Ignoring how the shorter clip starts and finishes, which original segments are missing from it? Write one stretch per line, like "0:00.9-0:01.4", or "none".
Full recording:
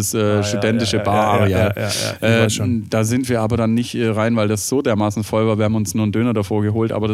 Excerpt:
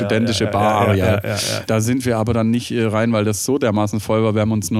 0:02.2-0:02.9